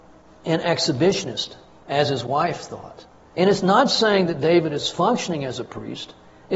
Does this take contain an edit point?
yes; 1 cut; at 3.3 s

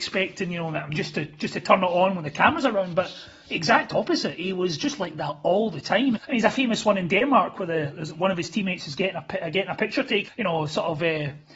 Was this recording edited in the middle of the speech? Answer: yes; 2 cuts; at 6.2 s, 10.3 s

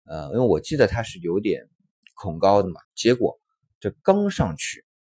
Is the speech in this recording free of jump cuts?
no; 1 cut; at 2.8 s

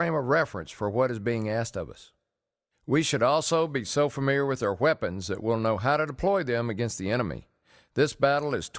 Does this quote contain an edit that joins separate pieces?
no; 0 cuts

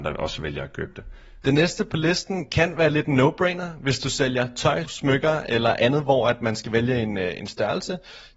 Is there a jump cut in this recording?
yes; 2 cuts; at 1.4 s, 4.8 s

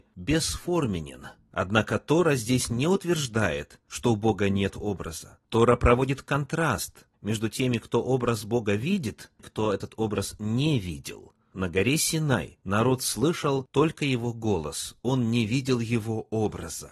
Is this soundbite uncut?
no; 2 cuts; at 9.4 s, 12.6 s

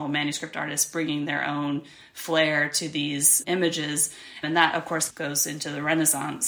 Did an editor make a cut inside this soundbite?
yes; 1 cut; at 4.4 s

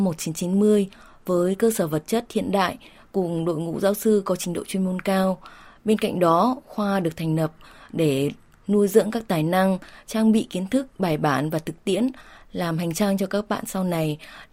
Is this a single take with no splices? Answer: yes; 0 cuts

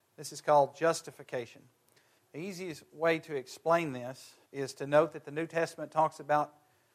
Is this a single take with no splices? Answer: no; 2 cuts; at 2.2 s, 4.4 s

